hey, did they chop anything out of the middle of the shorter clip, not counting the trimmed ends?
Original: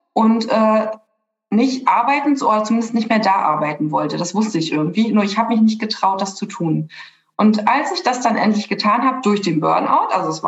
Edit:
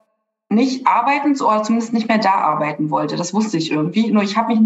no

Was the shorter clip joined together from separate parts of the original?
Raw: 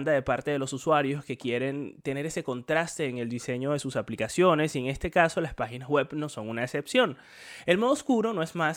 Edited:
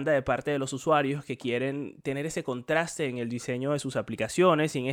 no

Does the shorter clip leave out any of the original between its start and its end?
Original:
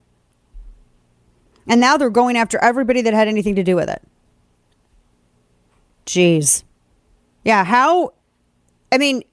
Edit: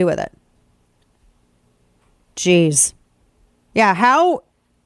no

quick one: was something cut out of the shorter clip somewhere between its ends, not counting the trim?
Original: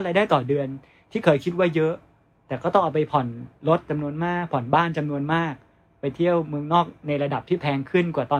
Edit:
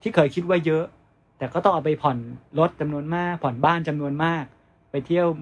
no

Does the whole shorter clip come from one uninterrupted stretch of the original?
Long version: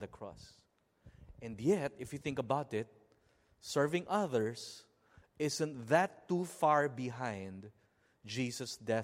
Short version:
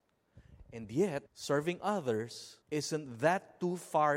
no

